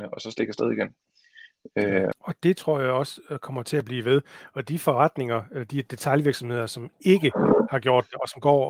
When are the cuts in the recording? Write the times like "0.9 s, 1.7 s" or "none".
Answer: 2.1 s